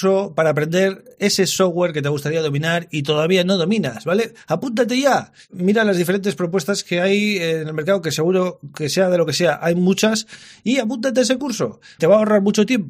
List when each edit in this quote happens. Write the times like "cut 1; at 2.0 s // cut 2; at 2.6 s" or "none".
cut 1; at 12.0 s